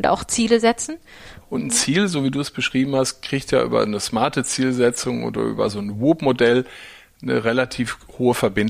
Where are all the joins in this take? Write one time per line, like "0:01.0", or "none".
0:01.4

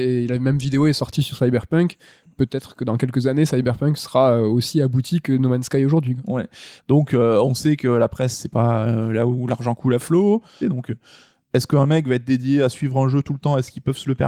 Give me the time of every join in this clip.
0:06.8
0:10.6

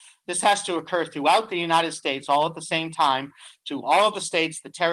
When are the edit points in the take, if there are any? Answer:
none

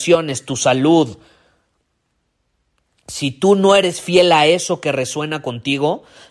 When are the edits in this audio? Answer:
none

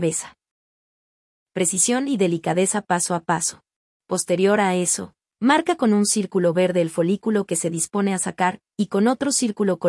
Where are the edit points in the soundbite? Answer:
0:03.9

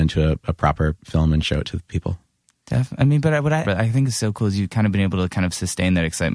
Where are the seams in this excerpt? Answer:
0:03.6

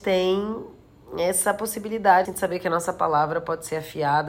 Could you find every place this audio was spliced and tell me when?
0:02.2

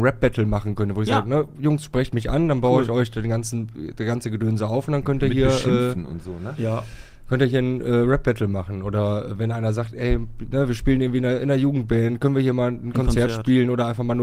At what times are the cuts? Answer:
none

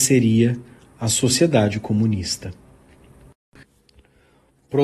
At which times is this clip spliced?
0:03.6

